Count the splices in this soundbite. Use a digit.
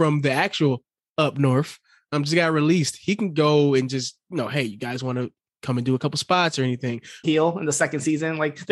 1